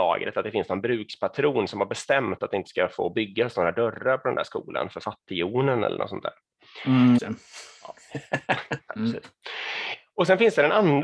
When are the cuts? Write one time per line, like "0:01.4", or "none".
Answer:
0:07.2
0:08.9

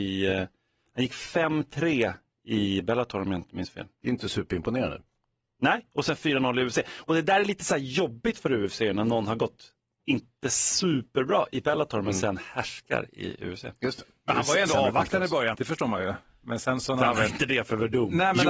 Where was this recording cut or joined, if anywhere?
0:15.5

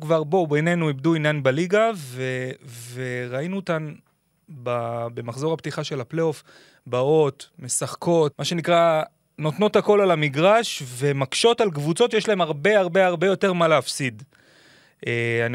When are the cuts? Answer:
0:08.3

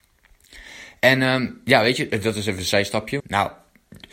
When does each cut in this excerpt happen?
0:03.2

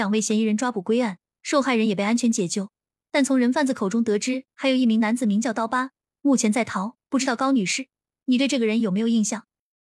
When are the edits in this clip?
none

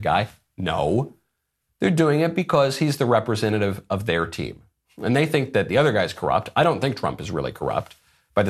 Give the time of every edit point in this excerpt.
none

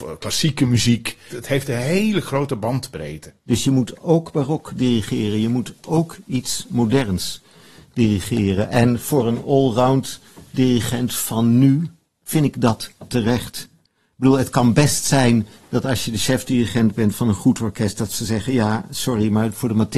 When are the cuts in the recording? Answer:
none

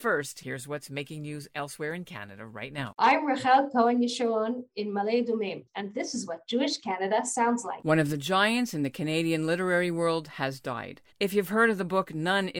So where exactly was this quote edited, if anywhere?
0:11.1

